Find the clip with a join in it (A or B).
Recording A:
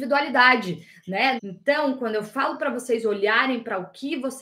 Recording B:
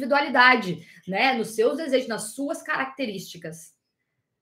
A